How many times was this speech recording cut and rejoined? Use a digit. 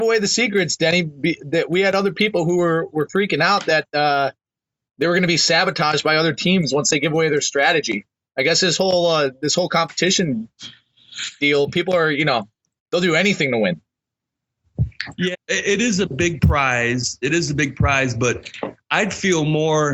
1